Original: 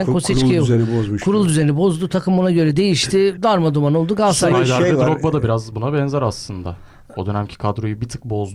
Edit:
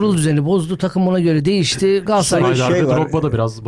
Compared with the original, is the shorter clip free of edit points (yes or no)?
no